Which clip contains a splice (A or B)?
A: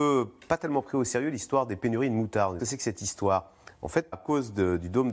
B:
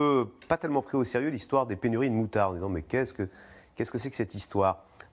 A